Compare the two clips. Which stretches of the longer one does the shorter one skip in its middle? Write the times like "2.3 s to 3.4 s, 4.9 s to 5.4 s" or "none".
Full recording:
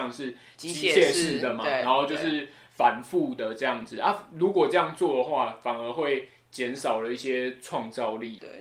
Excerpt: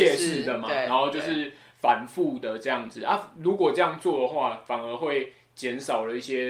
none